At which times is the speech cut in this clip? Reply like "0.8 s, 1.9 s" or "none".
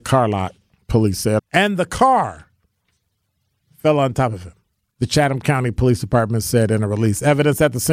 1.4 s, 4.9 s